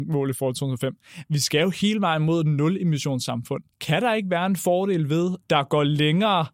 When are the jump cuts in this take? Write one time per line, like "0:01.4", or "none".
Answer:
0:03.7
0:05.4